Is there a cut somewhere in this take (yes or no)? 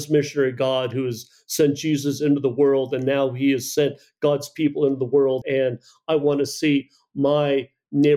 yes